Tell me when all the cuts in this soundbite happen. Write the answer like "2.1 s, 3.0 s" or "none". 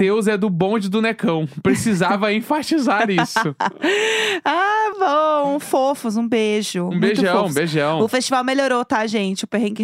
4.9 s